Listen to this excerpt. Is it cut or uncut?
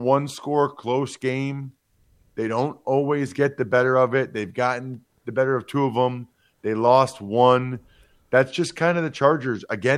uncut